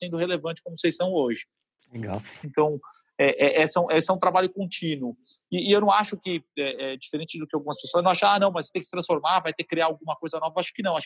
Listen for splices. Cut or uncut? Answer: cut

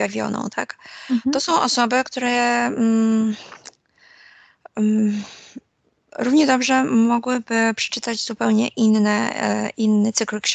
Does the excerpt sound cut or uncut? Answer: uncut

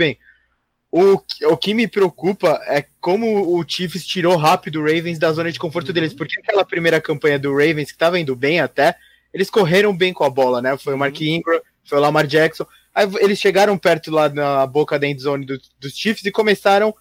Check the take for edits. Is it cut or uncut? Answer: uncut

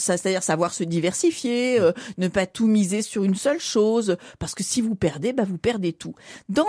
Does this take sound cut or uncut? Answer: uncut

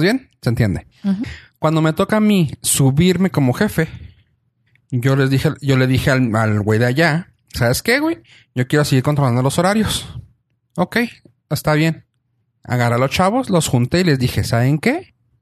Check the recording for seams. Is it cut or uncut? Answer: uncut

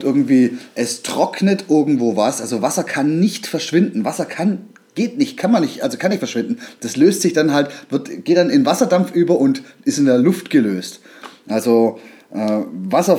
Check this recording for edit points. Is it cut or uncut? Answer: uncut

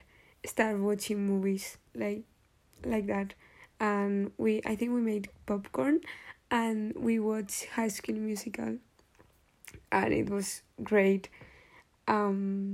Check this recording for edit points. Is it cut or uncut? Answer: cut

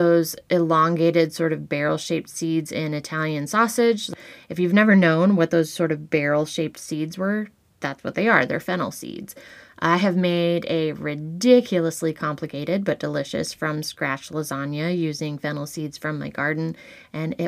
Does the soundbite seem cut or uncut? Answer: uncut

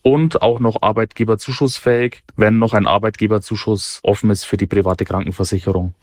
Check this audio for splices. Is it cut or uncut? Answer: cut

